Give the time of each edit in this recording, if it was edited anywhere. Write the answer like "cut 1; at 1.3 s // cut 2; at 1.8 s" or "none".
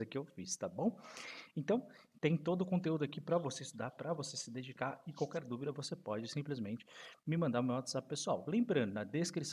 none